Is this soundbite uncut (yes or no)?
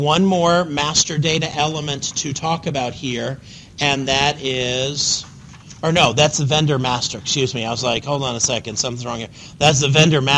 yes